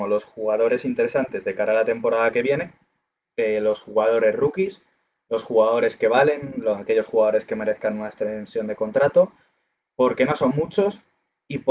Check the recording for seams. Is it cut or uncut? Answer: uncut